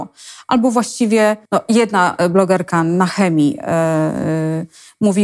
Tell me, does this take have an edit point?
yes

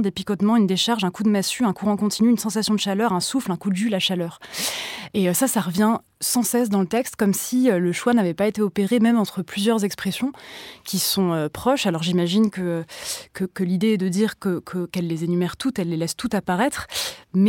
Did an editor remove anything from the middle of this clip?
no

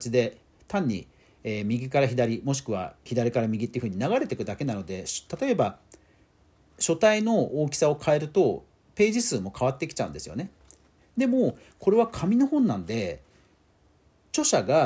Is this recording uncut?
no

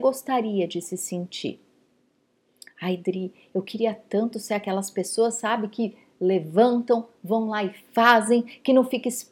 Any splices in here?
no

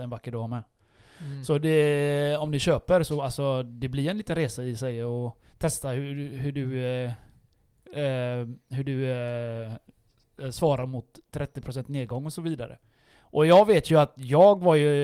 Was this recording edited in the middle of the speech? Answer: no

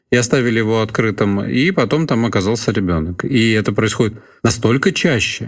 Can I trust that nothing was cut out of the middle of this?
yes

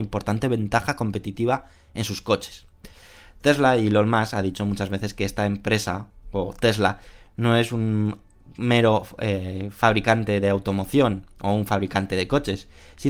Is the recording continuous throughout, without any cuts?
yes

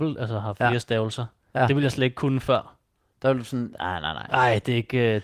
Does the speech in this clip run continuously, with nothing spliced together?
yes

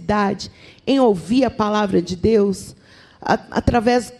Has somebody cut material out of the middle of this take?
no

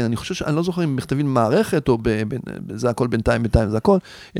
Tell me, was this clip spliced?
no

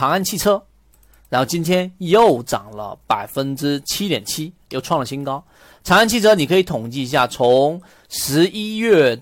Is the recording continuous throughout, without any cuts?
yes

